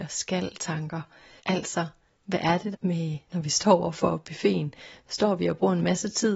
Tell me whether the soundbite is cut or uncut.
cut